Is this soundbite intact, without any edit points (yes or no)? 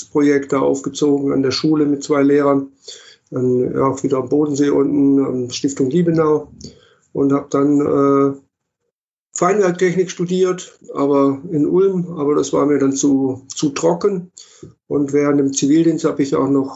yes